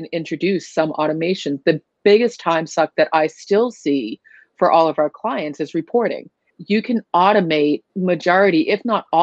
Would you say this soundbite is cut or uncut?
cut